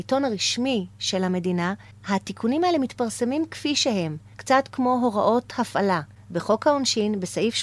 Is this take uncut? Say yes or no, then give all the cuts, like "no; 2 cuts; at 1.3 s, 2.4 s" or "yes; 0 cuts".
no; 1 cut; at 4.3 s